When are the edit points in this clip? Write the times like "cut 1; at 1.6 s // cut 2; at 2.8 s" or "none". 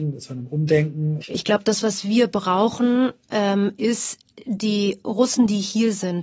cut 1; at 1.2 s